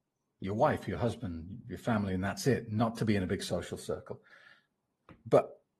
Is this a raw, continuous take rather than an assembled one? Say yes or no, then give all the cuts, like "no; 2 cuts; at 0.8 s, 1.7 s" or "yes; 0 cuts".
yes; 0 cuts